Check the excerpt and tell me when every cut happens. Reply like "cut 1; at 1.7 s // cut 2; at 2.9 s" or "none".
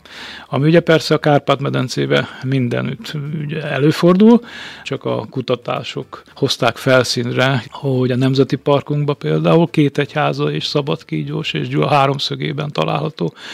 cut 1; at 4.8 s // cut 2; at 6.3 s // cut 3; at 7.6 s